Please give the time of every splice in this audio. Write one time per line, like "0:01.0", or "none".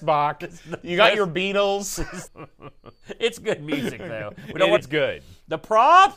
0:02.3
0:04.8